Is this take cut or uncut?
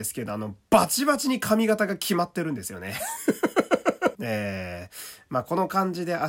cut